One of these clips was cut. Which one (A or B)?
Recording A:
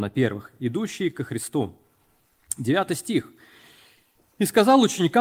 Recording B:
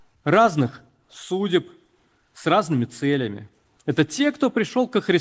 B